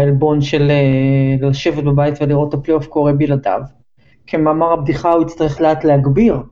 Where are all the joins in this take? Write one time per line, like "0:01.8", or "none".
0:04.1
0:05.6